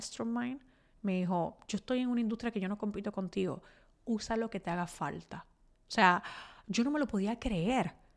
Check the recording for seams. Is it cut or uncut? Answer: uncut